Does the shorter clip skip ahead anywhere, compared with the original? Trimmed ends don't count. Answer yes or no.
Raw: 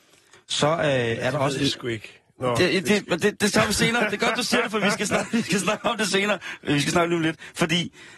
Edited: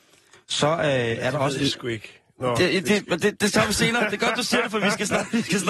no